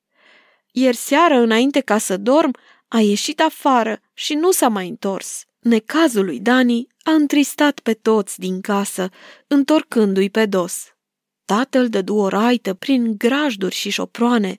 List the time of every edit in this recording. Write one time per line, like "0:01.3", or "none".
0:05.5